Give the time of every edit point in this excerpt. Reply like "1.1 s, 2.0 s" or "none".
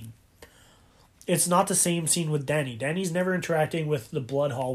none